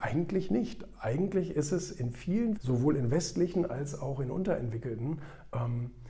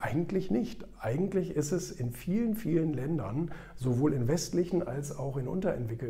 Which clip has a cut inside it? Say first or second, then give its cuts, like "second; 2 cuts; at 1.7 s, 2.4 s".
first; 1 cut; at 2.6 s